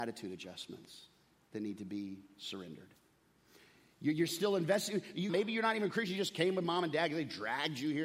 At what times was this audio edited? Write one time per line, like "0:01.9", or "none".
0:05.3